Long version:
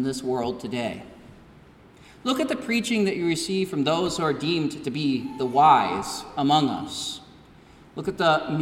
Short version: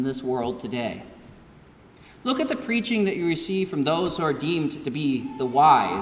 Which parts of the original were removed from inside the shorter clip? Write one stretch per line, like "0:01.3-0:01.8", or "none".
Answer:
none